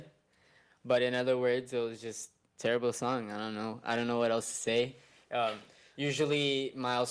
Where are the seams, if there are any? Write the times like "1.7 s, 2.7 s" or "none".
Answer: none